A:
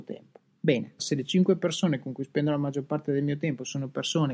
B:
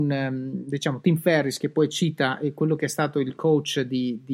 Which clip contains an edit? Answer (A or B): A